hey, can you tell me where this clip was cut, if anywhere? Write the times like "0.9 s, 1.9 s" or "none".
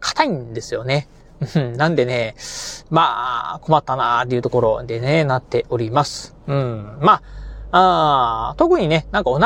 none